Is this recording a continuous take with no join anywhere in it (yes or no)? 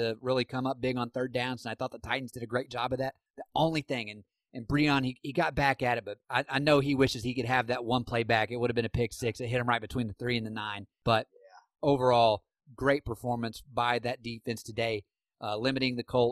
yes